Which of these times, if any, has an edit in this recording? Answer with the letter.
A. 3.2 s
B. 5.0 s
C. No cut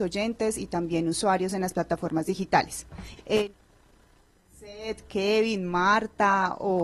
A